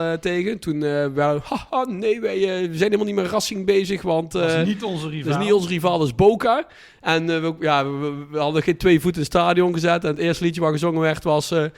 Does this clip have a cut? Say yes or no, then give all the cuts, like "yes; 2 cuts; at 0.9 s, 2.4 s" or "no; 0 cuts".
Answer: no; 0 cuts